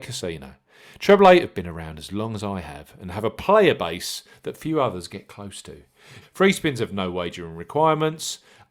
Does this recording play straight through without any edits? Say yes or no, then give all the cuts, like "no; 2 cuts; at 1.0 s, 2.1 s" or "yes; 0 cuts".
no; 1 cut; at 6.2 s